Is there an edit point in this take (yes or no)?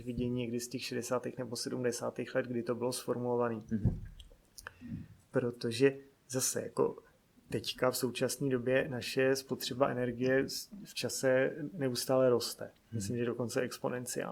no